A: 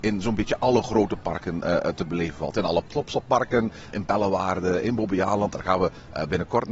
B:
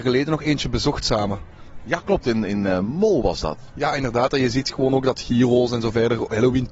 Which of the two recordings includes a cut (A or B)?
B